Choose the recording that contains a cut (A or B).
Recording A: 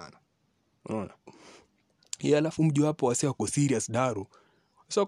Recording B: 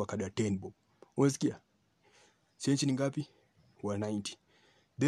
A